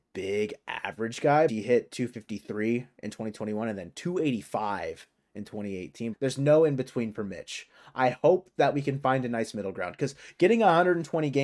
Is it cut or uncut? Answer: cut